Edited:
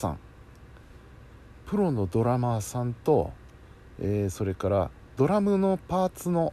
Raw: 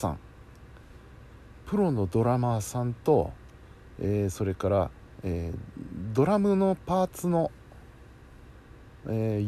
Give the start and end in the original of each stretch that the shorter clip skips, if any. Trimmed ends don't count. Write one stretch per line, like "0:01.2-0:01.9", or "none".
0:05.2-0:06.1